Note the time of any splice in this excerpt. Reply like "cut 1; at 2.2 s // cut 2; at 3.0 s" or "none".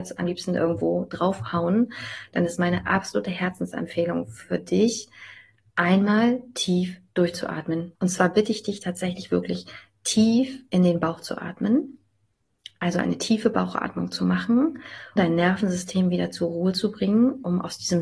cut 1; at 7.9 s // cut 2; at 15.2 s